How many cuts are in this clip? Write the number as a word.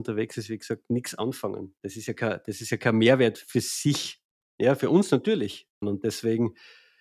one